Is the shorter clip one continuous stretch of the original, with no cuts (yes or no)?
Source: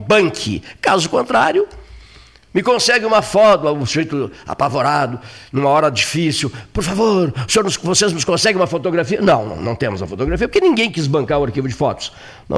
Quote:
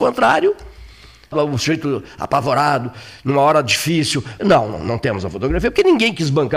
no